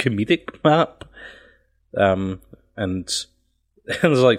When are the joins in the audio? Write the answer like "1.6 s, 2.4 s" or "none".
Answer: none